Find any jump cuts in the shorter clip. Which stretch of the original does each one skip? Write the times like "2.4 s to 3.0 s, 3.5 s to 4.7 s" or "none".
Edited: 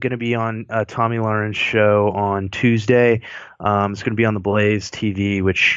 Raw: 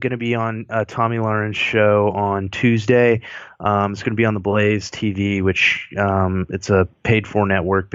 none